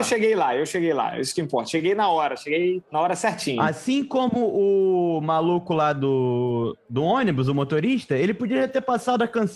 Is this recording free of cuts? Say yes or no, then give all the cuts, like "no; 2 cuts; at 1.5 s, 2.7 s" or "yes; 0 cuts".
yes; 0 cuts